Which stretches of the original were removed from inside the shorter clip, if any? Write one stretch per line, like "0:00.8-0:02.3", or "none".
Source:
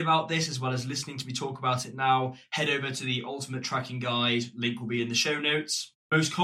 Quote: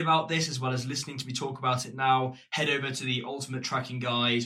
none